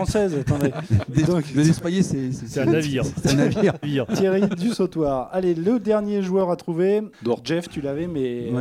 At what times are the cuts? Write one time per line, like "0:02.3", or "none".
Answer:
0:03.8
0:07.1